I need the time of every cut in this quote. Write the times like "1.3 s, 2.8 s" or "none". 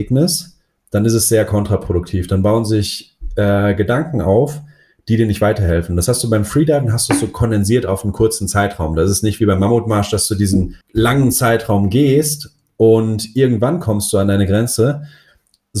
10.8 s